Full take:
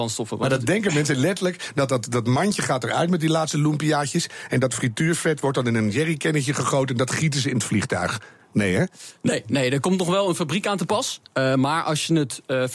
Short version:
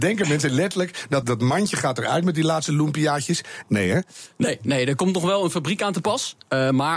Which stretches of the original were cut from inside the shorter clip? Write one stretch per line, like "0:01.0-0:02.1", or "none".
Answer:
0:01.9-0:02.1
0:04.5-0:08.5

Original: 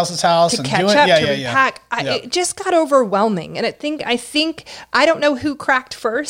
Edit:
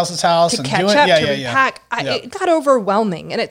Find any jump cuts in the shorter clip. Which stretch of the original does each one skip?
0:02.3-0:02.6

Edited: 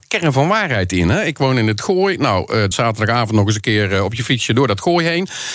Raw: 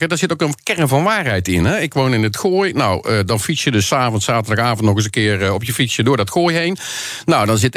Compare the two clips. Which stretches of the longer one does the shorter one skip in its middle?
0:03.3-0:04.2

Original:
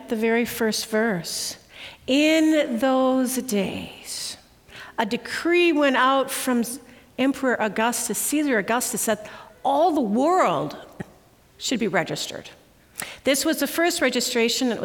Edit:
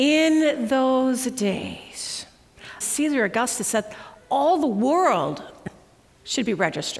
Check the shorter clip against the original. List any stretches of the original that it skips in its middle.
0:04.9-0:08.1

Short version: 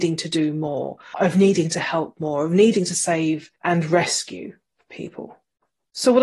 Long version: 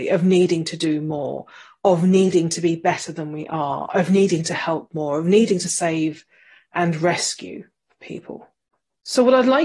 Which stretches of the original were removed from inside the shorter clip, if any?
0:01.6-0:03.9
0:06.3-0:06.7

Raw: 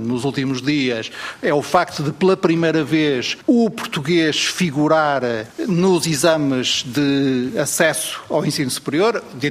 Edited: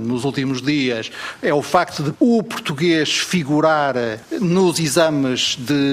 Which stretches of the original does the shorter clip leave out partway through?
0:02.1-0:03.4

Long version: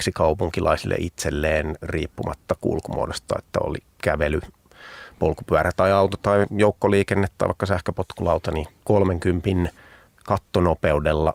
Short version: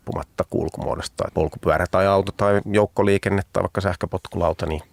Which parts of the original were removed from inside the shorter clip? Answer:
0:03.4-0:05.1

